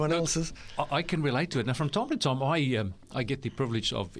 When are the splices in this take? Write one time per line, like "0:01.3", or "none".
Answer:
none